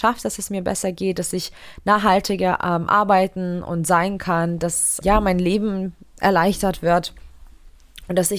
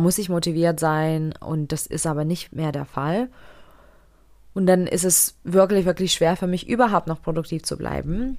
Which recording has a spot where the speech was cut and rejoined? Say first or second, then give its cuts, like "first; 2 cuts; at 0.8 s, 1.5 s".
first; 1 cut; at 5.0 s